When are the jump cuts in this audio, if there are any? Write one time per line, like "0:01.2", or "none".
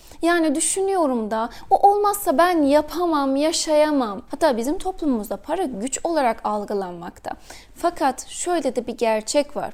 0:04.3